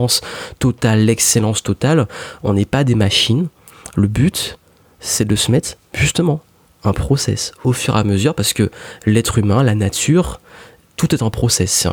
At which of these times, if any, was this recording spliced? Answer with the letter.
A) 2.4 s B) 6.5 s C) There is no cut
C